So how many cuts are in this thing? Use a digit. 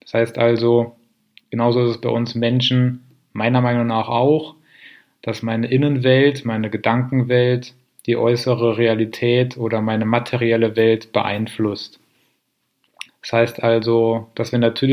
1